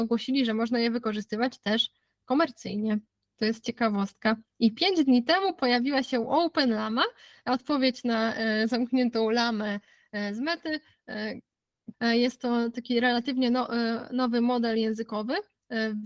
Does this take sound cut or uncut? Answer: cut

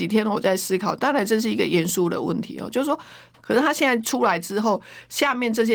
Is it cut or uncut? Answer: cut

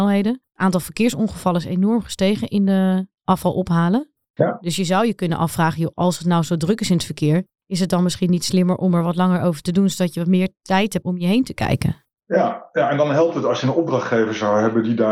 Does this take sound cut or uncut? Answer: cut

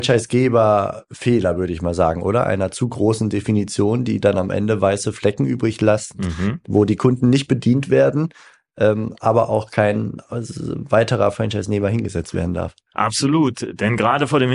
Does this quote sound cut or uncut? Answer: uncut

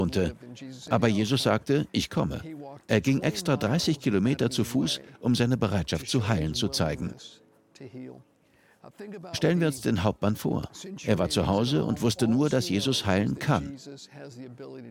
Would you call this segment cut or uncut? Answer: uncut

